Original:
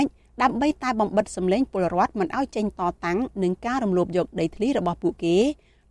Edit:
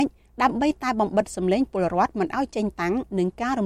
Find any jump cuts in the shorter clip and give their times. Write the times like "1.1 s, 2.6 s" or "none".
2.7 s